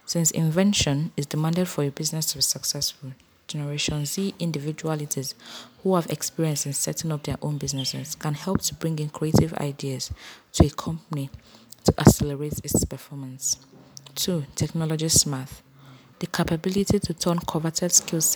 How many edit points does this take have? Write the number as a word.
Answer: one